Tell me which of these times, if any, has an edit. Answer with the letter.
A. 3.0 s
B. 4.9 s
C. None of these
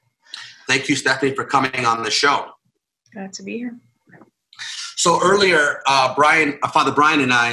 C